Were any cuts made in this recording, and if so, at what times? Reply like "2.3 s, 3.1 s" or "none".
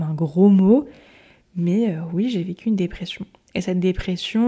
none